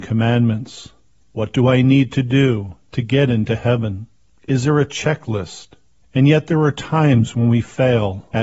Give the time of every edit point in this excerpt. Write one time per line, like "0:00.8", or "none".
0:01.2
0:06.0

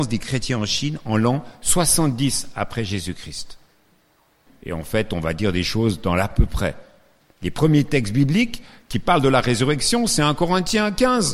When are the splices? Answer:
0:04.5
0:07.2

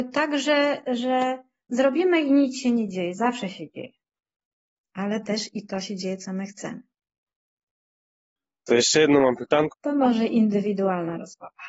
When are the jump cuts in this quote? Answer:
0:09.7

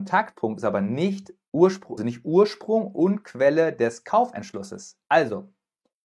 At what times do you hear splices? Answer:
0:02.0

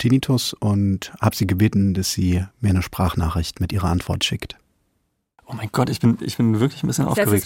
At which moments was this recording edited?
0:02.5

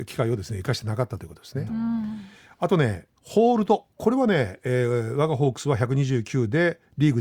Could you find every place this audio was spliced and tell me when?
0:01.7
0:03.2

